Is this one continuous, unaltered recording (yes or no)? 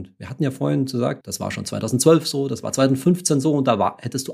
no